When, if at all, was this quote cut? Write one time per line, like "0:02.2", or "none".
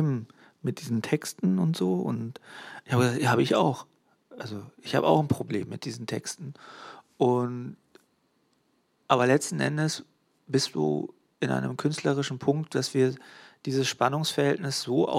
none